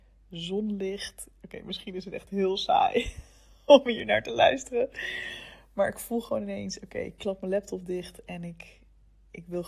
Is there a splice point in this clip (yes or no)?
no